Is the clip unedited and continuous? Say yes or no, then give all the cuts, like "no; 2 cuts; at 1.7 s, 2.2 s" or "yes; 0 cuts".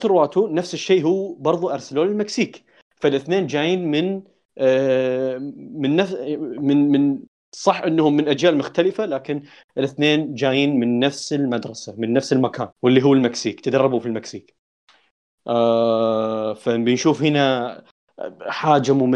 no; 1 cut; at 12.7 s